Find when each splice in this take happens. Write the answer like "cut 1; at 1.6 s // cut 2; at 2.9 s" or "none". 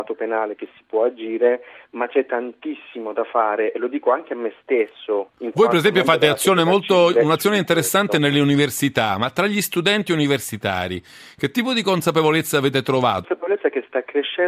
cut 1; at 13.2 s

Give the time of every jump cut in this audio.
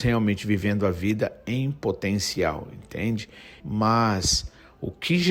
cut 1; at 3.6 s

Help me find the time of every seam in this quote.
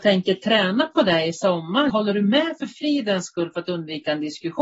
cut 1; at 1.9 s

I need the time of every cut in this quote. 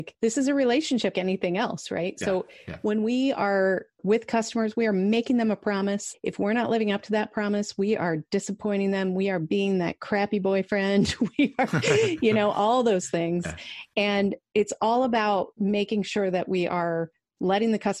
cut 1; at 1.1 s

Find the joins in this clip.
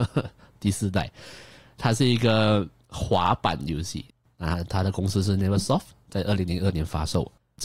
none

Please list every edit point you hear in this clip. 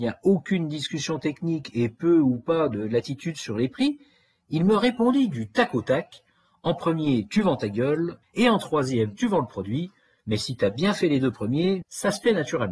cut 1; at 8.2 s // cut 2; at 11.8 s

